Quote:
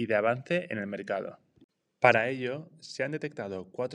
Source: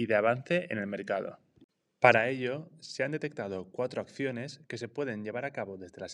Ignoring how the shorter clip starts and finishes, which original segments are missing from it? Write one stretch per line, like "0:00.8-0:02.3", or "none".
none